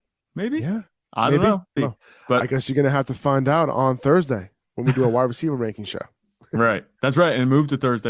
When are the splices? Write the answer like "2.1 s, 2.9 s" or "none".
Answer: 1.8 s